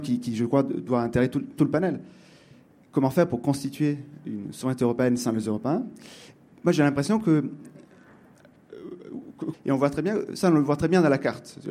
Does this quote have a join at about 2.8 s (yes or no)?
no